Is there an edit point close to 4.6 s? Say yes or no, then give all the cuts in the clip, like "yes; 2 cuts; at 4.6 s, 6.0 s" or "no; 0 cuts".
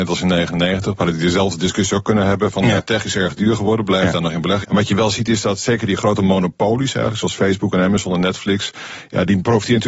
yes; 1 cut; at 4.6 s